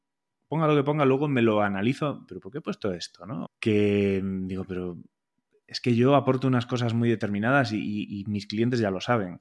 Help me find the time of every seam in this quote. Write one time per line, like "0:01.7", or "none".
0:02.3
0:03.4